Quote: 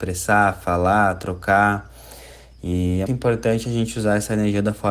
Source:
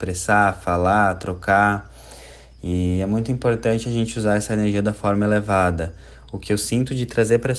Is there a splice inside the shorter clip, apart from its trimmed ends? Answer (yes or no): yes